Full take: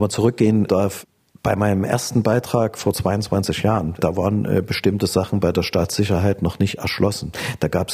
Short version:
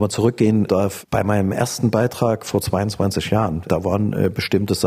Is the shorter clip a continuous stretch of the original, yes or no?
no